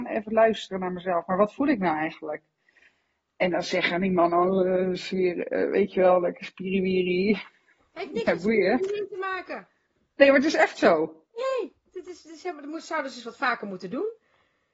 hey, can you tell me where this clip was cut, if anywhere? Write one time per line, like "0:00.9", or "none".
none